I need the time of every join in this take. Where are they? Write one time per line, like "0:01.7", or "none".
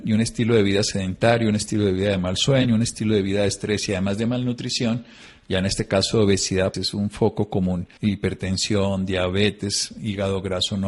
0:06.7
0:08.0